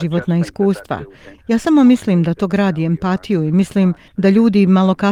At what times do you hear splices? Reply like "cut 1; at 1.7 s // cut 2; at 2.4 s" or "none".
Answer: cut 1; at 1.4 s